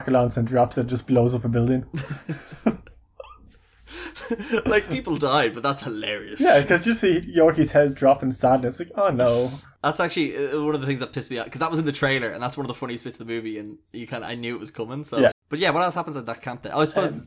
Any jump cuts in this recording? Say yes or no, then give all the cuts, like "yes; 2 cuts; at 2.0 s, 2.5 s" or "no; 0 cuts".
yes; 1 cut; at 15.3 s